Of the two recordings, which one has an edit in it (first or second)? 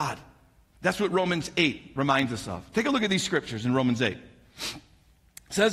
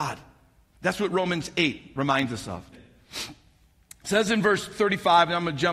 second